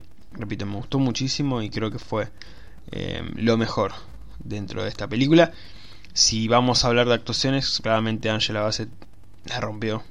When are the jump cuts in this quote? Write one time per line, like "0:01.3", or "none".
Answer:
0:07.8